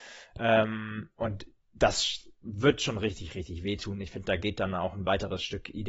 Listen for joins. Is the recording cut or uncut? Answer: uncut